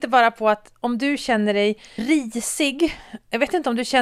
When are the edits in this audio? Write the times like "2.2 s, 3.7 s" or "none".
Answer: 2.0 s